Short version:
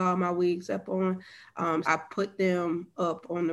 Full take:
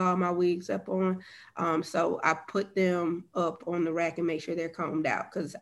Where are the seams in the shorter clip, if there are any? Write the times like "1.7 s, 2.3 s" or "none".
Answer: 1.8 s